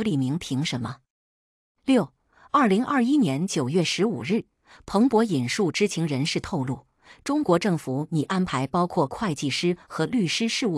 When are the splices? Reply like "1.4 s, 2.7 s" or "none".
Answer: none